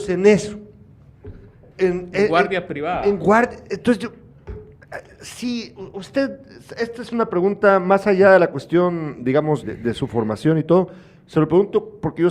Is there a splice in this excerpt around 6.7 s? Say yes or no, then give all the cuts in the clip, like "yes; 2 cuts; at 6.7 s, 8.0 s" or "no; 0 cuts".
no; 2 cuts; at 1.8 s, 9.6 s